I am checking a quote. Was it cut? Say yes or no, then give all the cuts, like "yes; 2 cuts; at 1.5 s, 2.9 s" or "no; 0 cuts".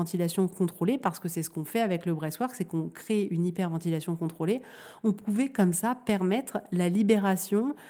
no; 0 cuts